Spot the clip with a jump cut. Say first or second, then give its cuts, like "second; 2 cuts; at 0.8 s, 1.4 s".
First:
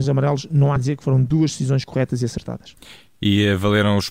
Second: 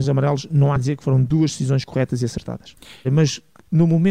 second; 1 cut; at 3.0 s